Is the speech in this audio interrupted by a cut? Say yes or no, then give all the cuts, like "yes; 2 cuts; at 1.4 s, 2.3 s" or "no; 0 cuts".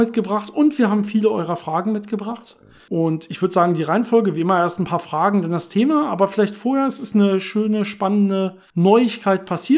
no; 0 cuts